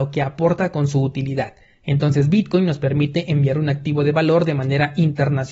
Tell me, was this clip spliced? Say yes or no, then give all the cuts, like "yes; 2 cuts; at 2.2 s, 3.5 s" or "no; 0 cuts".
no; 0 cuts